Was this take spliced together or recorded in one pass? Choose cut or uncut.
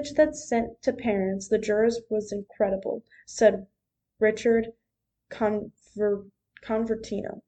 cut